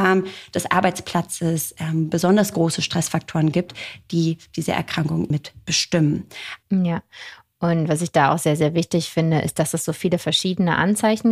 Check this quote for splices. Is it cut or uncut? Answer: cut